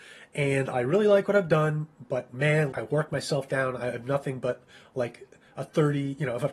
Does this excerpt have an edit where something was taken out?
yes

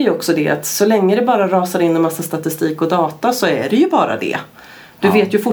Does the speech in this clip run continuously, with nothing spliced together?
yes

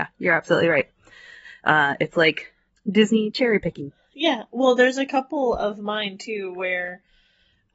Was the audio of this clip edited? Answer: no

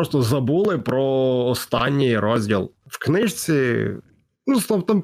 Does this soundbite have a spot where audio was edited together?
no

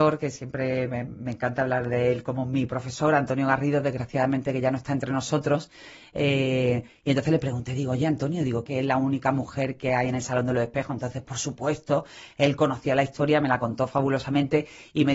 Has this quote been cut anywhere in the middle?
yes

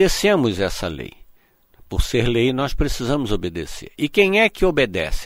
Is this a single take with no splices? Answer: yes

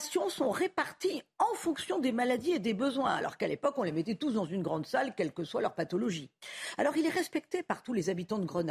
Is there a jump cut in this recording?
no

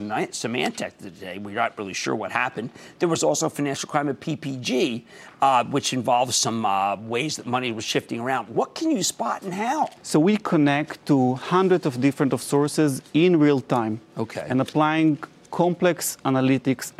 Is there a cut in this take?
yes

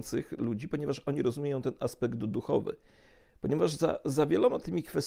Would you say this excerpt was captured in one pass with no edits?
yes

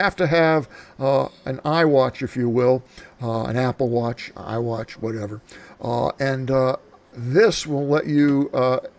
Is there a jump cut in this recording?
no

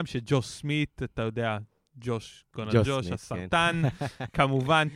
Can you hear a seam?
no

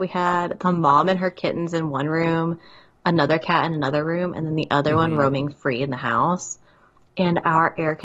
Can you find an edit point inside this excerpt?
no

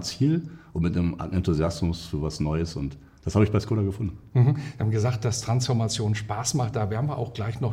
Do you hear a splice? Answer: no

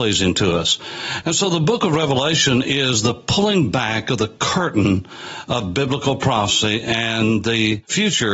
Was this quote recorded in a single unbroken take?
no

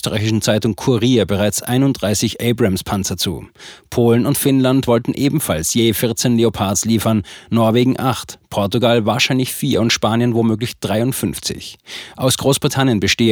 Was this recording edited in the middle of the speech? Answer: no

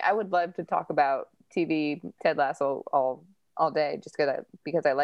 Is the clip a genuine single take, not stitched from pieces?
no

